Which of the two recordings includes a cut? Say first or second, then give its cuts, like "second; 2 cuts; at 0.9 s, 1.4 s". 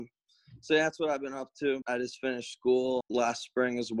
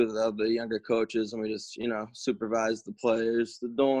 first; 2 cuts; at 1.8 s, 3.0 s